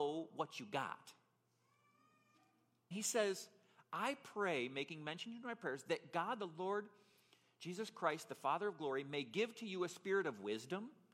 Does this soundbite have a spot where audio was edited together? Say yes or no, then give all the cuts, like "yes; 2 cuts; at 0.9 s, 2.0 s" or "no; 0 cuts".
yes; 1 cut; at 2.9 s